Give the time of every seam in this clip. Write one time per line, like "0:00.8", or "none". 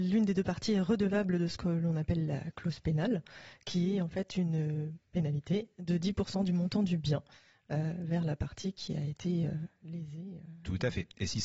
none